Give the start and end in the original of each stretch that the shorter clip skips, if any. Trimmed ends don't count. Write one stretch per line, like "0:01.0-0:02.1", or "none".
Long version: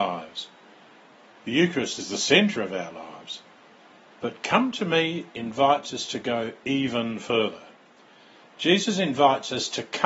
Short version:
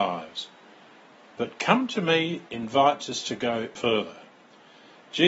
0:01.3-0:04.2
0:06.6-0:07.2